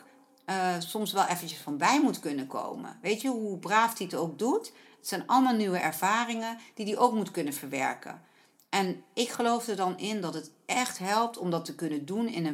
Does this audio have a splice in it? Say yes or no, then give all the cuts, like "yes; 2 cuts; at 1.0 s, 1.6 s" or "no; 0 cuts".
no; 0 cuts